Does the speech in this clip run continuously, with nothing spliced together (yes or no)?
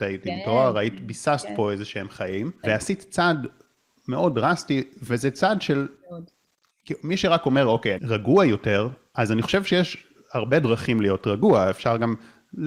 no